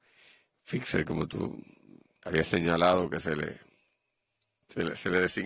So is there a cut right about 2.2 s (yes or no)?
yes